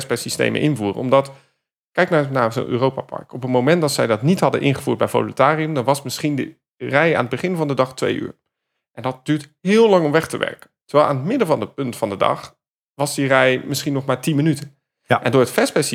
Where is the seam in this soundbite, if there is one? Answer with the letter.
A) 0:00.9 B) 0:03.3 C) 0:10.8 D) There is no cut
C